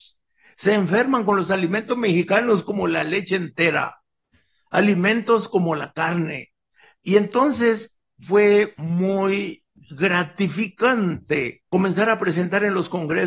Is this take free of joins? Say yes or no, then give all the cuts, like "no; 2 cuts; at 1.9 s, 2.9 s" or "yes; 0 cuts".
no; 1 cut; at 11.7 s